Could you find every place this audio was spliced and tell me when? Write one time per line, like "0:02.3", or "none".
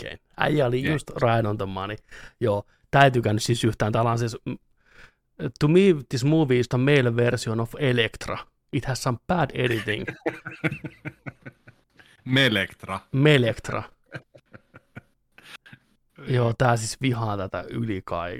0:06.7